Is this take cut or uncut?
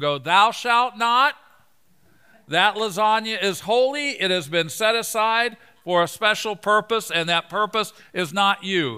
uncut